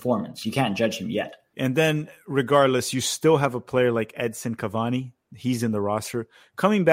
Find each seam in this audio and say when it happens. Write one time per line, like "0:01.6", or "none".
0:01.5